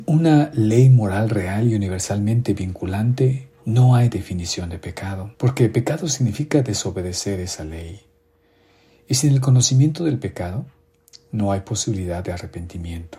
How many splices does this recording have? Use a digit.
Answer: 1